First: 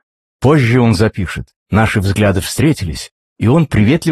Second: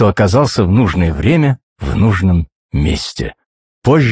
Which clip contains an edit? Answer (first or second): first